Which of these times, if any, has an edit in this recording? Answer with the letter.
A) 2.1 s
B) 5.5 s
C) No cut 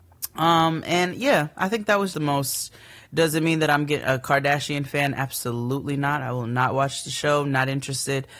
A